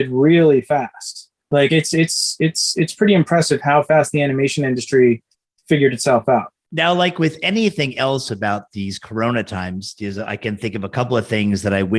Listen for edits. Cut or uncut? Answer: uncut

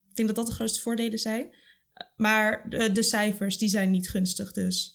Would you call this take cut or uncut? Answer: uncut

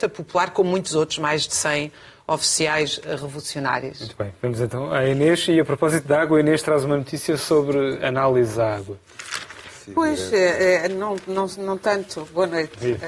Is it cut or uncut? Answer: uncut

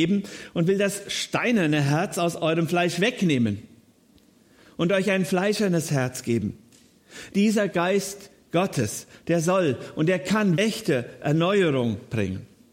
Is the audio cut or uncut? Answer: cut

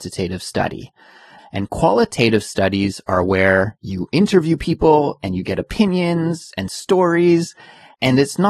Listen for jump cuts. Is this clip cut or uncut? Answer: cut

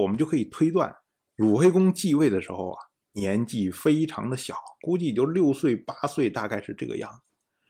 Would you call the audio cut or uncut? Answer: uncut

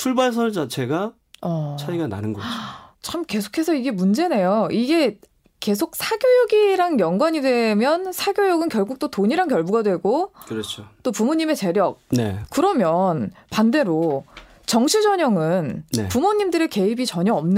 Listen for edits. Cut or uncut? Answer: cut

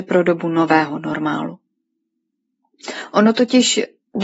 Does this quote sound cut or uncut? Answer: uncut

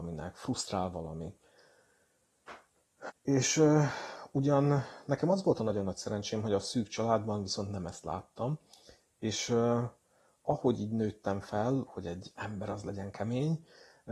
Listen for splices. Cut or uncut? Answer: cut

